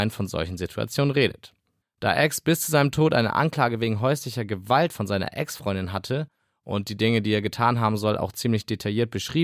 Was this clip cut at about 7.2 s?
no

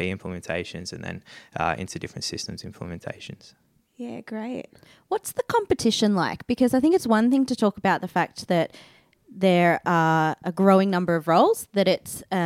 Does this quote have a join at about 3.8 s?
no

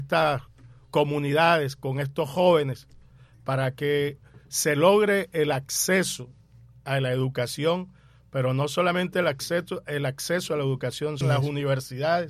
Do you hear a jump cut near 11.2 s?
yes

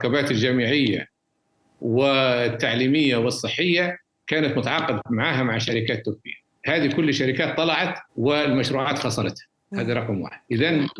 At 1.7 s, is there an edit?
no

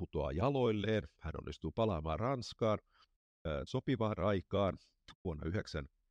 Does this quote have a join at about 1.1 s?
no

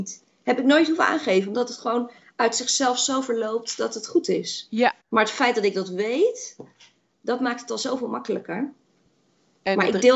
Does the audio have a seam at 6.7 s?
no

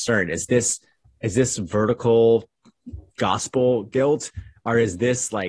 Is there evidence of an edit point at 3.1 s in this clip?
yes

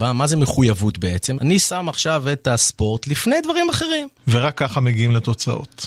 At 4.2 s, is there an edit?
yes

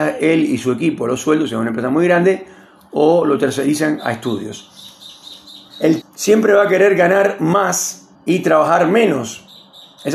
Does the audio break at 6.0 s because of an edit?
yes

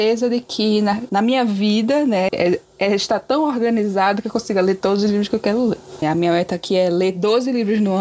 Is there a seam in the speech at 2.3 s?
yes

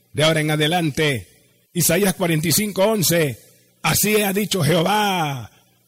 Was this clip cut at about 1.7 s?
yes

